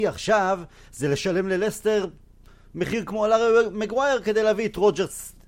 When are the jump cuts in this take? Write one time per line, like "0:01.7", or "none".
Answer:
none